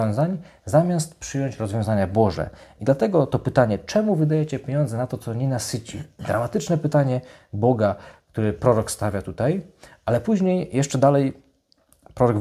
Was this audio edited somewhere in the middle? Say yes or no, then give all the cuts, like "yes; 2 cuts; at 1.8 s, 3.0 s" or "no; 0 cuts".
no; 0 cuts